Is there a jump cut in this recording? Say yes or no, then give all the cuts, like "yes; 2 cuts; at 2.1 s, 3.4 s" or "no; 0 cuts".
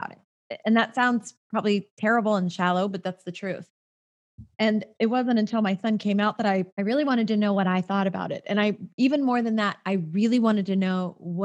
yes; 1 cut; at 6.7 s